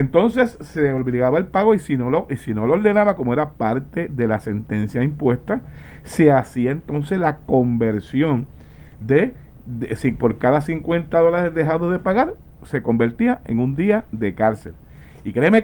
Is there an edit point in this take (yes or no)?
no